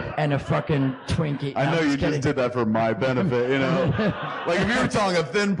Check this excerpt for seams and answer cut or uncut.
uncut